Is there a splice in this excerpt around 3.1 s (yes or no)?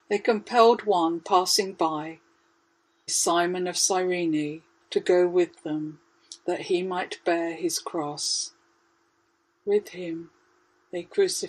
yes